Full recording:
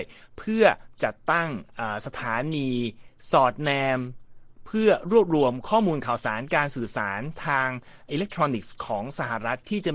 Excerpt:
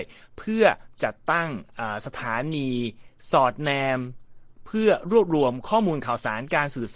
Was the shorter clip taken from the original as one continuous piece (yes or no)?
yes